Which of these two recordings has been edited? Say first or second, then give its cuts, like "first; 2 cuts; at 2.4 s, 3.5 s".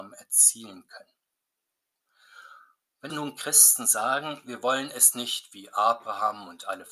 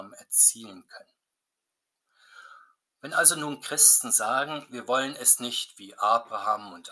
first; 1 cut; at 3.1 s